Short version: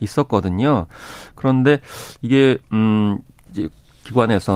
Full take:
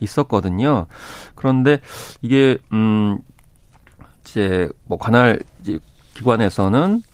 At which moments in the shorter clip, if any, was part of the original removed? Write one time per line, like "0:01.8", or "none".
0:03.5